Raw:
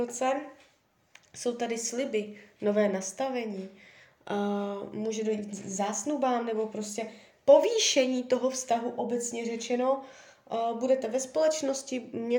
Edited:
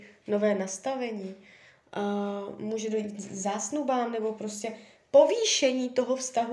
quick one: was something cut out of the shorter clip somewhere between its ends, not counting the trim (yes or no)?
no